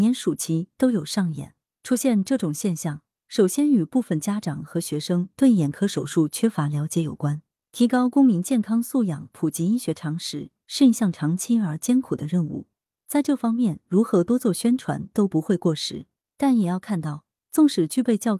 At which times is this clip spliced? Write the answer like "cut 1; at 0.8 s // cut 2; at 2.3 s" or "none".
none